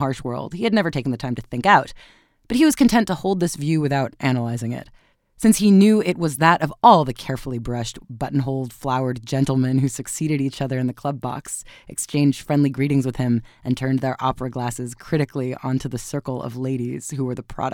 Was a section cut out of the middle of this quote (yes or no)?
yes